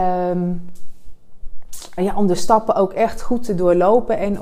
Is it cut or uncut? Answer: cut